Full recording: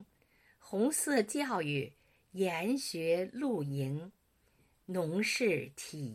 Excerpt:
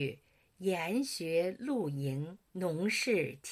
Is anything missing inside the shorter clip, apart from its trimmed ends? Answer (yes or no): yes